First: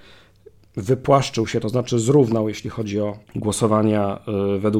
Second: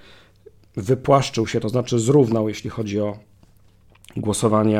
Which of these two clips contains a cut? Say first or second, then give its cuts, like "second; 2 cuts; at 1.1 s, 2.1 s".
first; 1 cut; at 3.3 s